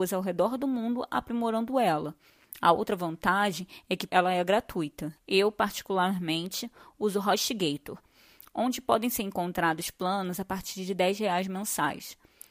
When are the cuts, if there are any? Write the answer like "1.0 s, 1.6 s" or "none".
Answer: 4.1 s, 5.2 s